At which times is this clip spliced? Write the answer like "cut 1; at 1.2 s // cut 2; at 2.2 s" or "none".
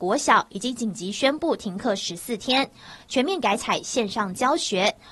cut 1; at 3.0 s